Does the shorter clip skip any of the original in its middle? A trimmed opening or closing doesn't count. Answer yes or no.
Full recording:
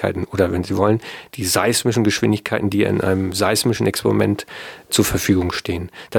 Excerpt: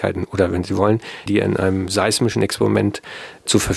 yes